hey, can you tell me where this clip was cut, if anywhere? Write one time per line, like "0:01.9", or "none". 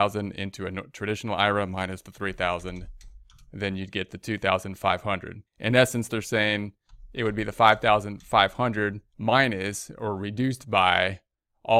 0:05.5
0:09.1

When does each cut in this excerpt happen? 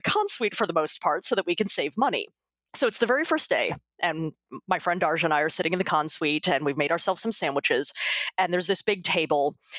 none

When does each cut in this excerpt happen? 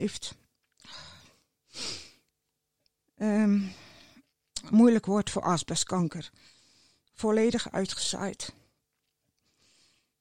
0:03.1

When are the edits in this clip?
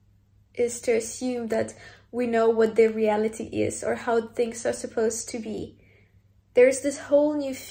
none

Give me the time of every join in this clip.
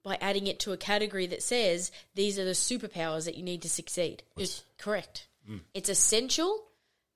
0:04.4
0:05.7

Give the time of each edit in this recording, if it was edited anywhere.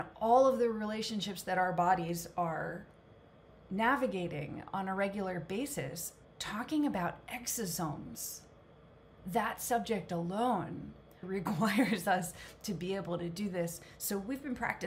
0:06.2
0:11.2

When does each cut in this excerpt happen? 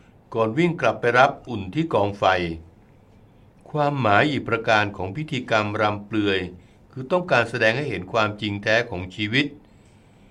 0:01.5

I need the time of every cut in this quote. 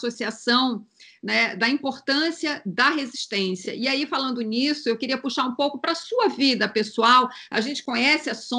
none

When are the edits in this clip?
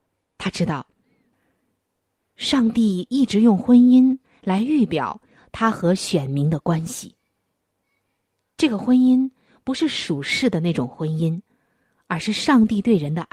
none

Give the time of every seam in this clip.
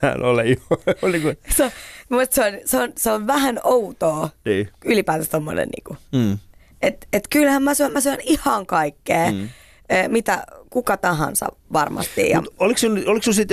none

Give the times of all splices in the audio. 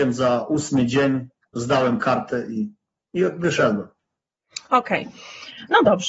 none

